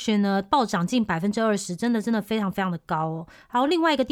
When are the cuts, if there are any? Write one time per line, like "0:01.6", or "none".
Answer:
none